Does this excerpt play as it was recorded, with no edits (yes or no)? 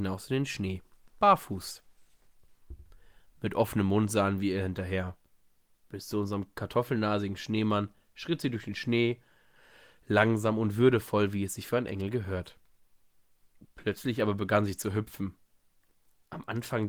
yes